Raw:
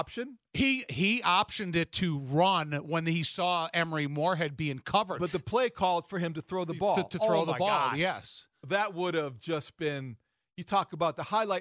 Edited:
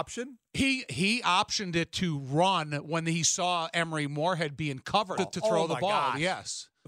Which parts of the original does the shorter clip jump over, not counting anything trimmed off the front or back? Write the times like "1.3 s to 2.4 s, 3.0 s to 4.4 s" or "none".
5.2 s to 7.0 s